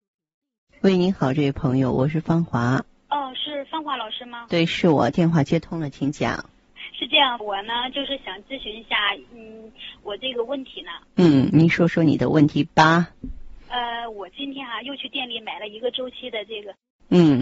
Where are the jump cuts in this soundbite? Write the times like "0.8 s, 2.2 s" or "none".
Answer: 7.4 s